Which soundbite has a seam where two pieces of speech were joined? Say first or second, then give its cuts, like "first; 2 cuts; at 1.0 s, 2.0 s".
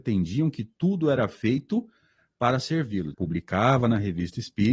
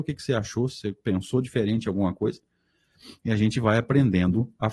first; 1 cut; at 3.1 s